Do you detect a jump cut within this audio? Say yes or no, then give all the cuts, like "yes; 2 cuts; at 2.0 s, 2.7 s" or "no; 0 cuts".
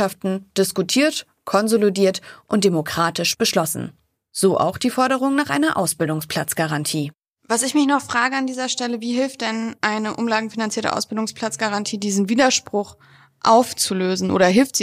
no; 0 cuts